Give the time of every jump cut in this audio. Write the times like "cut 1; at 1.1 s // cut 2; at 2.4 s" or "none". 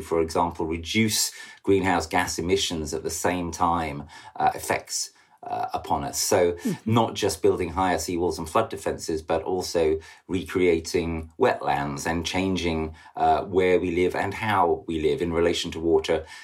cut 1; at 4.5 s